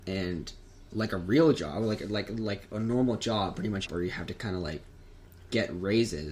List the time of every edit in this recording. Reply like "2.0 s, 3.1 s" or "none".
3.9 s